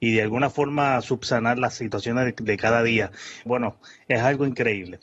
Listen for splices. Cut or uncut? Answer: cut